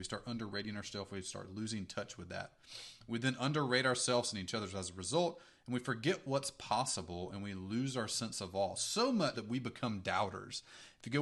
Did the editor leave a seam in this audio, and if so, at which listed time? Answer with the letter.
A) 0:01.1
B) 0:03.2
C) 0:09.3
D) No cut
C